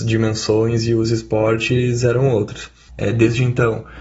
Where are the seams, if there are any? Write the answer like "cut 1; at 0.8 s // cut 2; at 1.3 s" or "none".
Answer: cut 1; at 2.9 s